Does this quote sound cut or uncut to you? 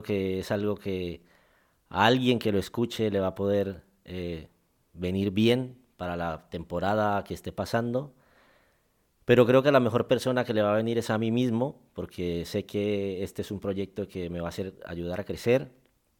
uncut